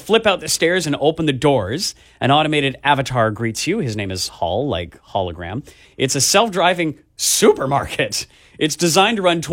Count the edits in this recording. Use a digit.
1